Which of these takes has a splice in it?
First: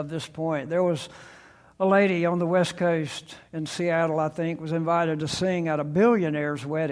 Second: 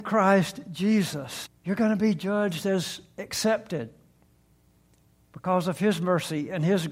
second; 1 cut; at 1.5 s

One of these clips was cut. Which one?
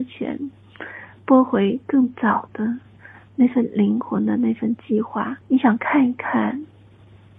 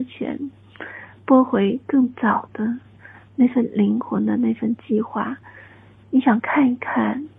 first; 1 cut; at 5.4 s

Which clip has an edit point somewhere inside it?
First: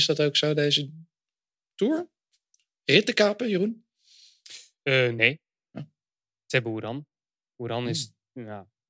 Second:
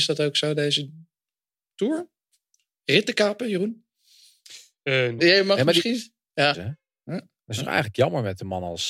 second; 2 cuts; at 5.2 s, 6.5 s

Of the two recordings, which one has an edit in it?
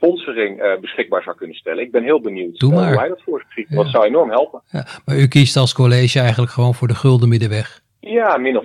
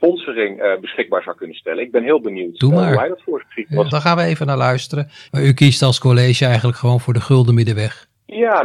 second; 2 cuts; at 3.9 s, 5.3 s

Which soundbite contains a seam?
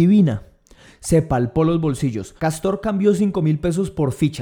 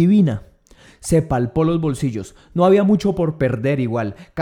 first; 1 cut; at 2.4 s

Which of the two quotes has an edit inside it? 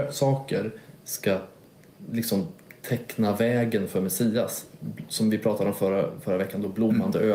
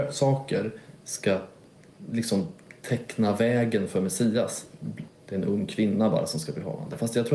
second; 1 cut; at 5.1 s

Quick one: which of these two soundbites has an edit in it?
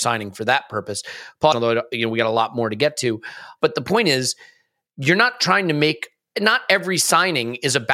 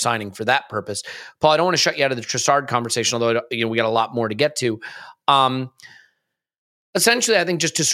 first; 2 cuts; at 1.5 s, 3.6 s

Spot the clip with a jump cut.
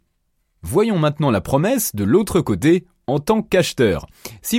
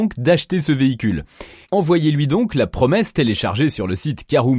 second; 1 cut; at 1.6 s

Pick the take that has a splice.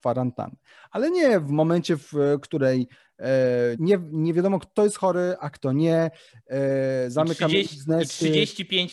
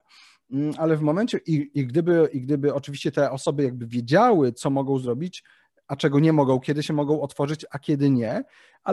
first; 1 cut; at 3.7 s

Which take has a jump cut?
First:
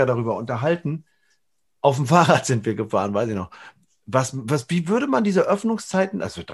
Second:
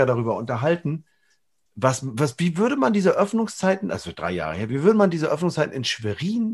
second; 1 cut; at 1.7 s

